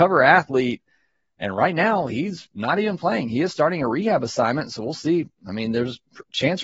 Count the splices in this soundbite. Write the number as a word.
zero